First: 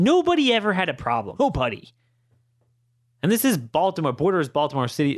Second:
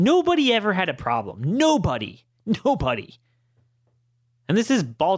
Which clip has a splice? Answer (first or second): first